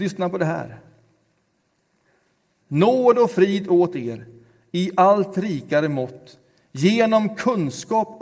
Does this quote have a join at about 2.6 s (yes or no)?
yes